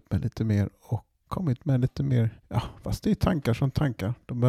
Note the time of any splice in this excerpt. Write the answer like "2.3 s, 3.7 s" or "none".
1.3 s, 2.4 s